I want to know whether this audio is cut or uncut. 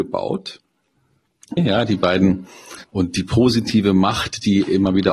cut